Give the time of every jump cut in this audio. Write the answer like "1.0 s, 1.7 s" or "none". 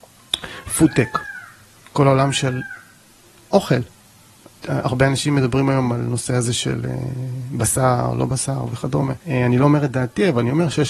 4.6 s, 9.2 s